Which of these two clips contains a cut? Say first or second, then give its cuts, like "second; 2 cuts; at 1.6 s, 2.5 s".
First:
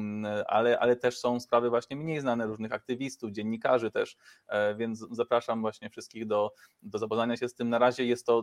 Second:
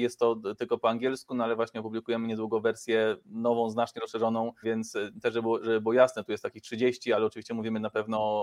second; 1 cut; at 4.6 s